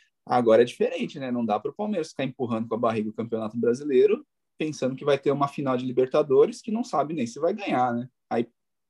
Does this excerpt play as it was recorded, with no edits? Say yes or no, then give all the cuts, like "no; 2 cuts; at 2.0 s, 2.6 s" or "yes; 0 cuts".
yes; 0 cuts